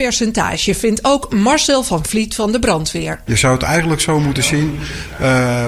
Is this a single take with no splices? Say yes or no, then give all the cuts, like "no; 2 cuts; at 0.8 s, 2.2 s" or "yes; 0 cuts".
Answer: no; 1 cut; at 3.3 s